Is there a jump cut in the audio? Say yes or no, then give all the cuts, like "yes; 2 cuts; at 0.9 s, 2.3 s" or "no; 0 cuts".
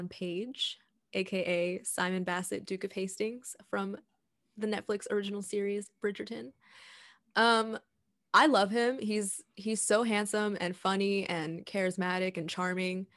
no; 0 cuts